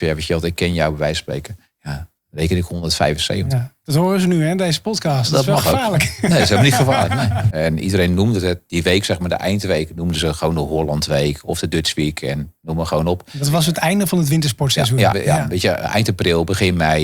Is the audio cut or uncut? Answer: cut